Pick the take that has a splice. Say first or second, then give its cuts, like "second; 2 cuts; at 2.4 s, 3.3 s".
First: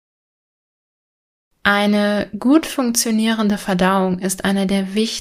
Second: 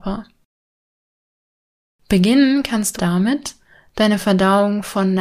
second; 1 cut; at 3.0 s